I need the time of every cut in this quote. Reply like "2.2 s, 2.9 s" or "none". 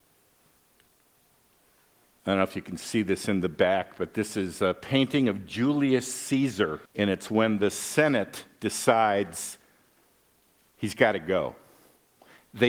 6.9 s